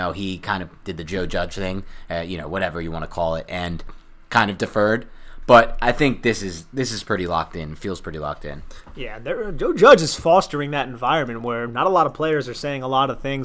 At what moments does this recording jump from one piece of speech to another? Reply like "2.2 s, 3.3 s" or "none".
none